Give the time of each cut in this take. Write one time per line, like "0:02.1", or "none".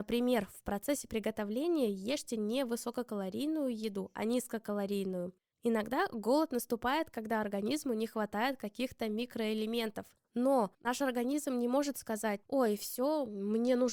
0:05.5